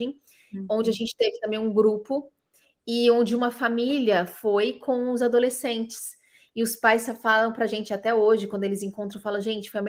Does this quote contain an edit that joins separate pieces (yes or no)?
no